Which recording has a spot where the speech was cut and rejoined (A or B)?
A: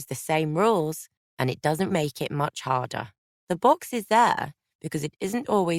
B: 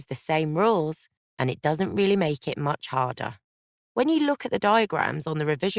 A